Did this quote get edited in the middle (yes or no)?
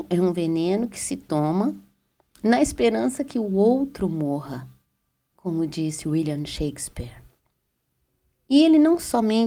no